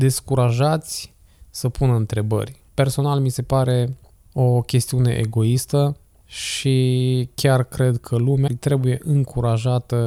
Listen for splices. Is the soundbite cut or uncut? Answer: cut